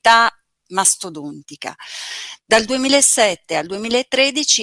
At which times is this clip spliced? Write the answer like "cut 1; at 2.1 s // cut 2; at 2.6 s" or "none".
none